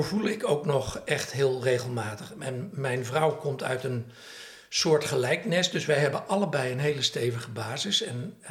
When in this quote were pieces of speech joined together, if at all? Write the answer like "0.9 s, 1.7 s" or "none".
none